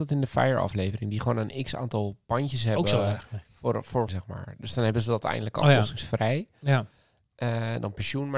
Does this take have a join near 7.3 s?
no; 1 cut; at 4.1 s

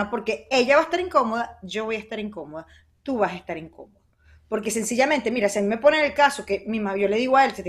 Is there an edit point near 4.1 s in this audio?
no; 0 cuts

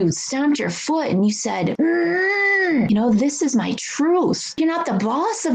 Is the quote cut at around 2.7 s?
no; 0 cuts

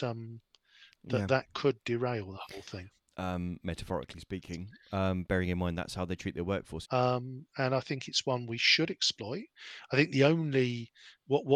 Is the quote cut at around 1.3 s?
no; 2 cuts; at 3.0 s, 6.8 s

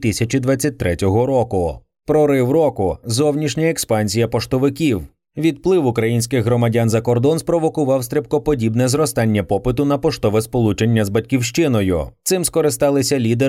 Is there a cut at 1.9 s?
no; 0 cuts

